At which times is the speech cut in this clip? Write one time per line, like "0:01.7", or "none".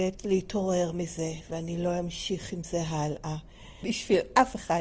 0:03.8